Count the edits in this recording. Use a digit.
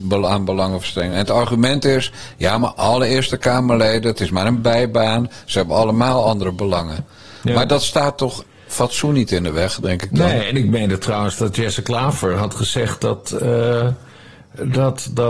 0